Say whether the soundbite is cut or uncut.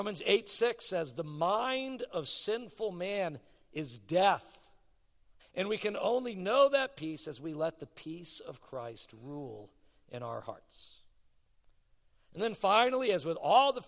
cut